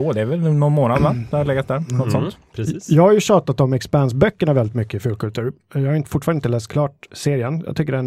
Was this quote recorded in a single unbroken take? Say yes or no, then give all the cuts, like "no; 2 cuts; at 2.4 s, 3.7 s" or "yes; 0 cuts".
yes; 0 cuts